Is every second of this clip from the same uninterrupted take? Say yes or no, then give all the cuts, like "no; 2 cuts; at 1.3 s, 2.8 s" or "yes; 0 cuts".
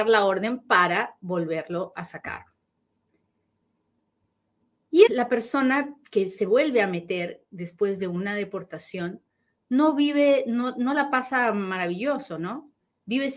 no; 1 cut; at 5.1 s